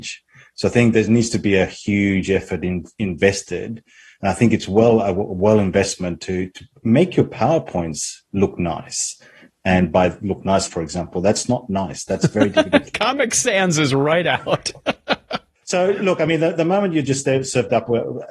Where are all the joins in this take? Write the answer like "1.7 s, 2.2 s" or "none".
10.7 s